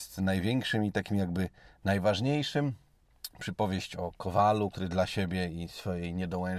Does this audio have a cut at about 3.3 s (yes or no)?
no